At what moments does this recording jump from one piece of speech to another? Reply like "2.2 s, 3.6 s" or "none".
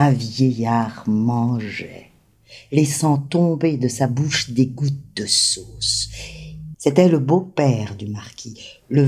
6.7 s